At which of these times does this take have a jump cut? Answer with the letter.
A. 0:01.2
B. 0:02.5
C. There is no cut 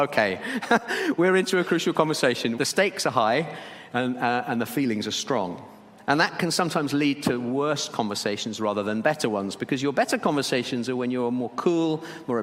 B